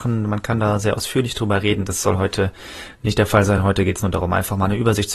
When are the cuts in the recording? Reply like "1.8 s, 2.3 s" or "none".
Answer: none